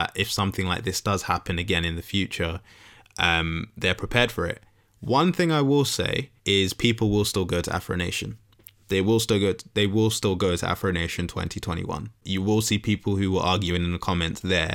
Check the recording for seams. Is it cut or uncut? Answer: cut